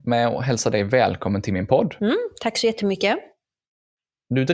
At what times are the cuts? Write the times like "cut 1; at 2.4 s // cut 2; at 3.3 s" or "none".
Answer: none